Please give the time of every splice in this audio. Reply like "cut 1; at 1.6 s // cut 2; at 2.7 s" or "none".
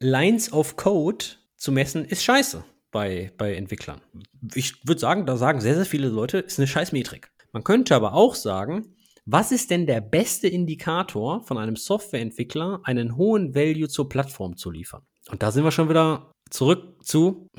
none